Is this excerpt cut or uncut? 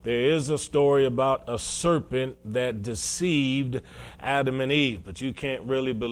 uncut